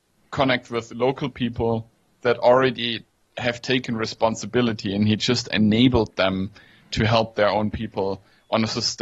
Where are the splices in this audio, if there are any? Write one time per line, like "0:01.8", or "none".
none